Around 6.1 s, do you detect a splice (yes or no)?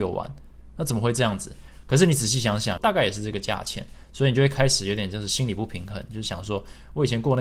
no